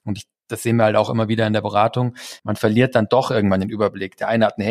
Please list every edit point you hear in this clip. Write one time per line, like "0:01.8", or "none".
0:02.4